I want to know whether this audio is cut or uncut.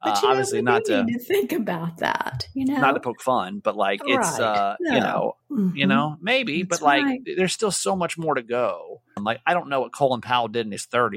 cut